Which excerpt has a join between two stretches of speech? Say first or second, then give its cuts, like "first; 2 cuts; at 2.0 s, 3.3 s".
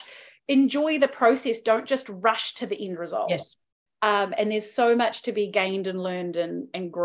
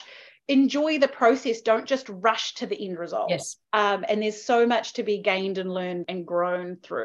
second; 2 cuts; at 3.6 s, 6.0 s